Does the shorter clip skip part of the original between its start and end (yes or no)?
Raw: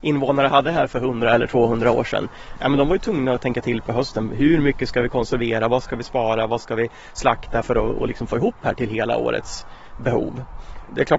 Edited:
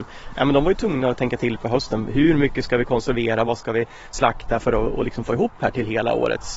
yes